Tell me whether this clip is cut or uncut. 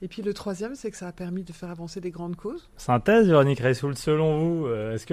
cut